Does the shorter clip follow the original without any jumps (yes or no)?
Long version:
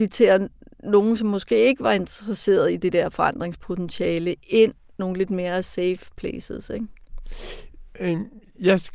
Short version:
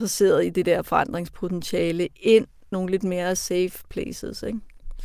yes